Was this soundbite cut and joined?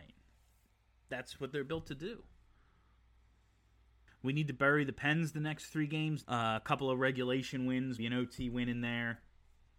yes; 2 cuts; at 6.2 s, 8.0 s

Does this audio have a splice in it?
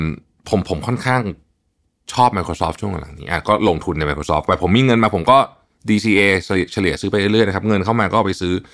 no; 0 cuts

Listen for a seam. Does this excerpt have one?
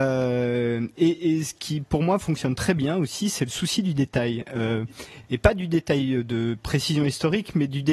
no; 0 cuts

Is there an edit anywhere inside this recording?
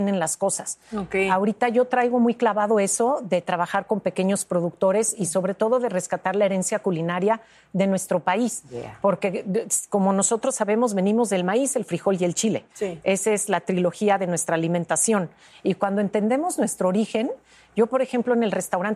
no; 0 cuts

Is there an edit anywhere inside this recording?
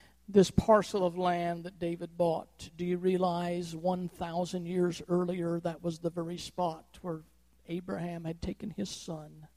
no; 0 cuts

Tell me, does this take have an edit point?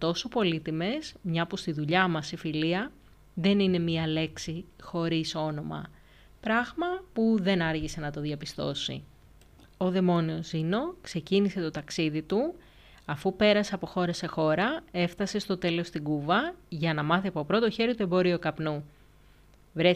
no; 0 cuts

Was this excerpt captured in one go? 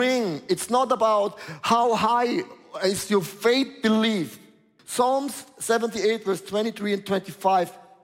no; 1 cut; at 4.8 s

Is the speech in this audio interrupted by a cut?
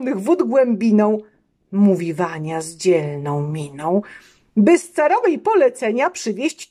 no; 0 cuts

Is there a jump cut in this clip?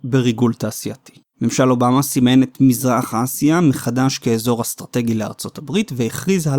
yes; 1 cut; at 1.3 s

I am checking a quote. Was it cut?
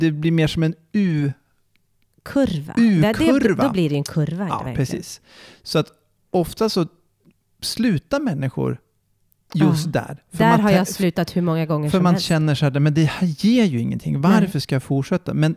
no; 0 cuts

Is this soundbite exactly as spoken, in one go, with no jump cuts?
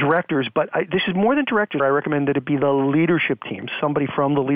no; 1 cut; at 1.8 s

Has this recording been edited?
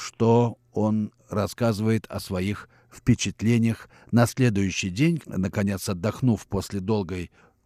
yes; 1 cut; at 5.2 s

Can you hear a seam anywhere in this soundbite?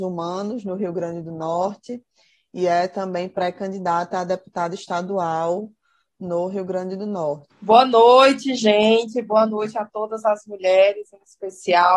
yes; 1 cut; at 7.5 s

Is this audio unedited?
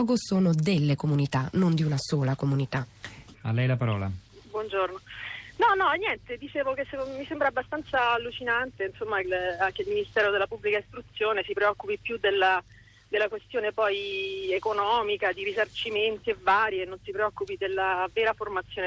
no; 2 cuts; at 3.3 s, 9.2 s

